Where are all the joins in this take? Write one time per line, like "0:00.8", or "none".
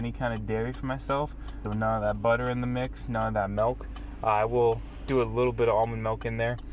0:01.6